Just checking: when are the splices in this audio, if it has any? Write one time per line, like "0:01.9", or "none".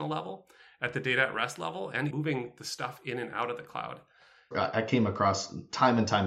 0:02.1
0:04.5